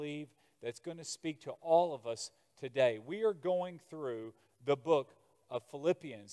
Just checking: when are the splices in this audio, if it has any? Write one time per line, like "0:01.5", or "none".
none